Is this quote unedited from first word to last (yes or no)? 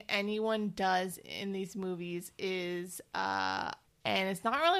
no